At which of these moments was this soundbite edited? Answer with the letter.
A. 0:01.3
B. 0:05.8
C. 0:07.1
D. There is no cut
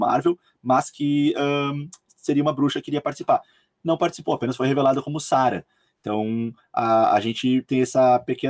D